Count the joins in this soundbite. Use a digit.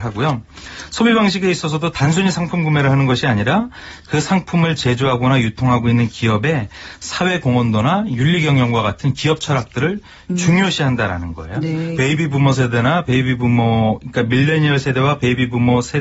1